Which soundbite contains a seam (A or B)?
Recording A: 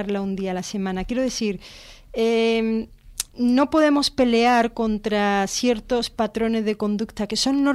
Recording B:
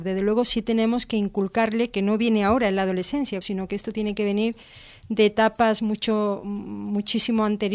B